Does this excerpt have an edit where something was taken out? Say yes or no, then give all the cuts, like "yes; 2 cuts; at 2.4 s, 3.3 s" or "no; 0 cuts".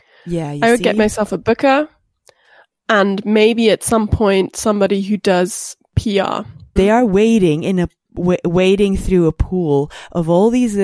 yes; 1 cut; at 6.8 s